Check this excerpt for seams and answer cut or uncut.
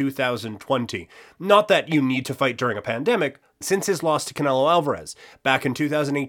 cut